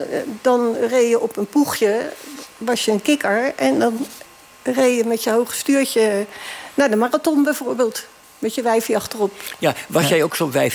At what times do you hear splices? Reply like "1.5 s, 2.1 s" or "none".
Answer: none